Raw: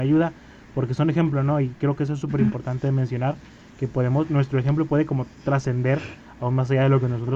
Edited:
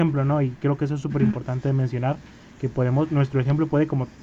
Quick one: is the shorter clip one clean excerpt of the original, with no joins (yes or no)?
yes